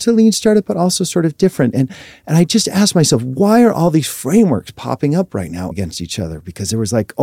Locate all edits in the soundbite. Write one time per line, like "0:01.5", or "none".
0:05.7